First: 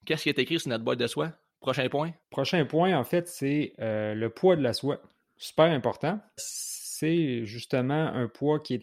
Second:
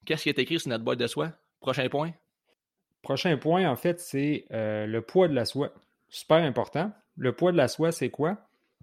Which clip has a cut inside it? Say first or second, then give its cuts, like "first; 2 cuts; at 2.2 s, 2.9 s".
first; 2 cuts; at 2.2 s, 6.4 s